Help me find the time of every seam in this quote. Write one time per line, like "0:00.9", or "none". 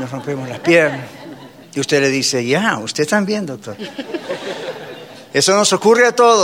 0:01.6